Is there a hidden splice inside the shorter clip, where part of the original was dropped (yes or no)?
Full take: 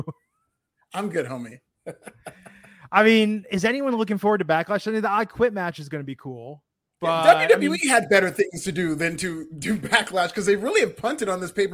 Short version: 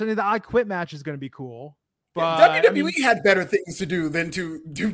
no